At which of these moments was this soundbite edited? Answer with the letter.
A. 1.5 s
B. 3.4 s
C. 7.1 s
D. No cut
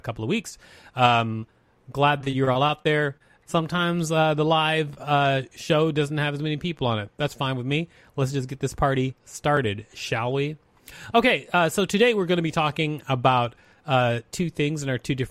B